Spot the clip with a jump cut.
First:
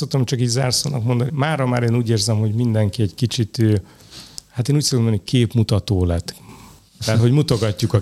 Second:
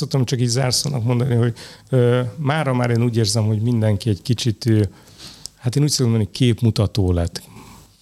first; 1 cut; at 1.3 s

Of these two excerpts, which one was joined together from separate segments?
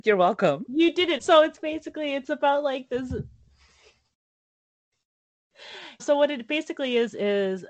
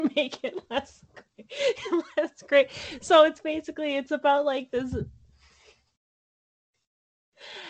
first; 2 cuts; at 1.2 s, 6.0 s

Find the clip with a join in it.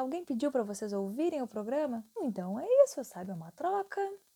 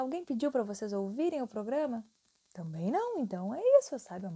first; 1 cut; at 2.2 s

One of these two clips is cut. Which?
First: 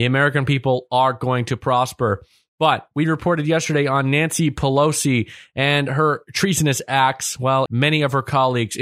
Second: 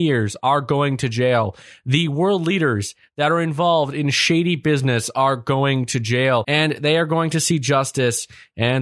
first; 1 cut; at 7.7 s

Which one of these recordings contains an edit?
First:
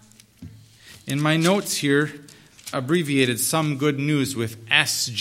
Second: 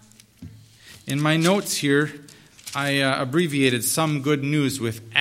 first; 1 cut; at 2.7 s

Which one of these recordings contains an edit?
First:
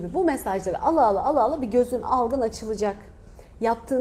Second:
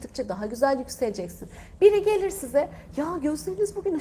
second; 1 cut; at 1.8 s

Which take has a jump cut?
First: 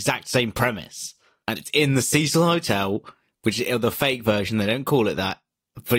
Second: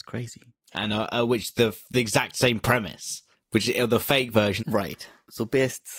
second; 2 cuts; at 3.3 s, 4.6 s

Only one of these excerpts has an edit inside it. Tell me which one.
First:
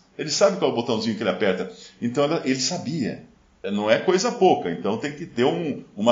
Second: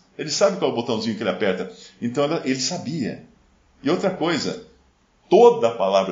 first; 1 cut; at 3.6 s

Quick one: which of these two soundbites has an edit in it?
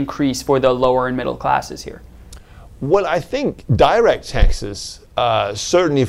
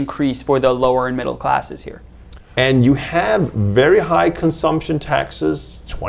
second; 1 cut; at 2.6 s

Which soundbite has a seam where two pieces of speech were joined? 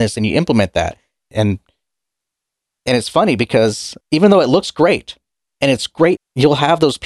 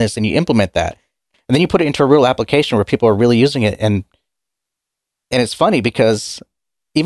first; 3 cuts; at 1.3 s, 4.0 s, 6.2 s

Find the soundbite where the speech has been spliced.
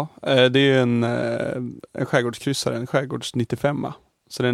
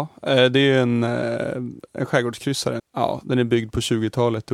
second; 1 cut; at 2.8 s

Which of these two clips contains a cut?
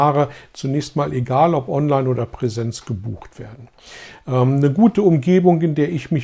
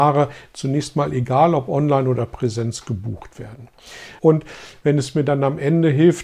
second; 1 cut; at 4.2 s

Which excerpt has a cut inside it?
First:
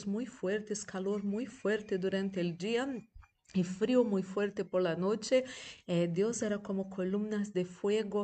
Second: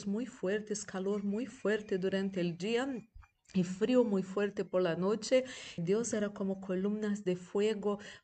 second; 1 cut; at 5.8 s

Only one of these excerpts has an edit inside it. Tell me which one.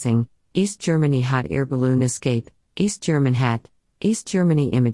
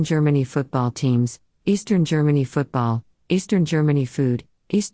first; 1 cut; at 3.9 s

